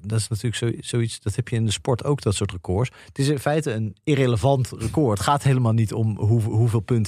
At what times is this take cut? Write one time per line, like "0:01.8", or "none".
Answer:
none